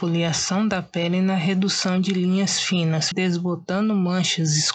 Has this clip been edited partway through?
yes; 1 cut; at 3.1 s

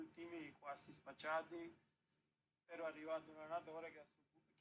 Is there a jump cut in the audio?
no; 0 cuts

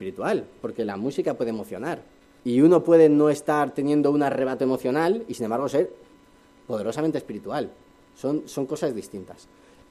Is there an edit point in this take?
yes; 1 cut; at 2.4 s

